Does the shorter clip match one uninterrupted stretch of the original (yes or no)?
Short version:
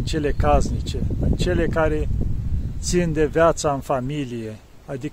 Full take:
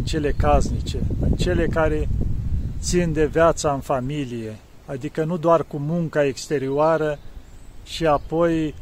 yes